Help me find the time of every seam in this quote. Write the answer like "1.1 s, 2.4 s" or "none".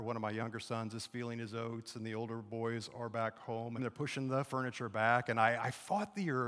3.8 s